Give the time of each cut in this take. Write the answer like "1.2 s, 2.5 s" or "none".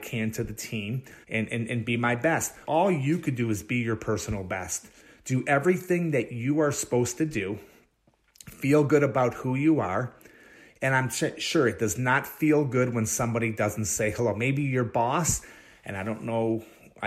1.2 s, 2.6 s